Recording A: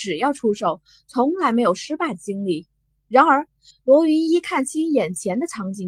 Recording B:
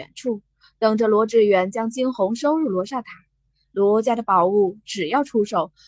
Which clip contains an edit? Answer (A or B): A